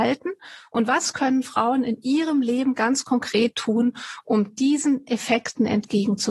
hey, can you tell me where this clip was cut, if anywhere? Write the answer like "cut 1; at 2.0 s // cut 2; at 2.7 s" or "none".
none